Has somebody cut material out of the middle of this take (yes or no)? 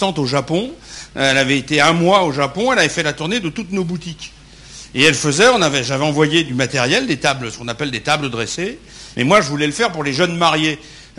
yes